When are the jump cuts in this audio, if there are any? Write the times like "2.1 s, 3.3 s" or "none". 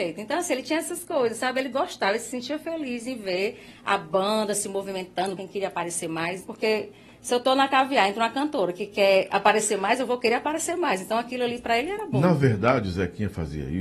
5.4 s, 6.4 s

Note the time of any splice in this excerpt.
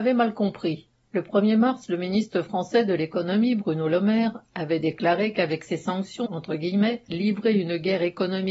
1.0 s, 6.3 s

